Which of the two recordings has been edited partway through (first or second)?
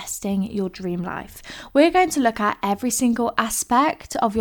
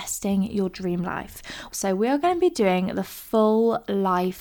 second